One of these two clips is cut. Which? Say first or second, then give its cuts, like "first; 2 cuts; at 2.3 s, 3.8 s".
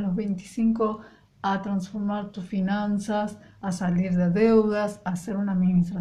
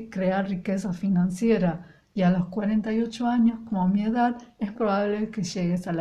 second; 1 cut; at 4.7 s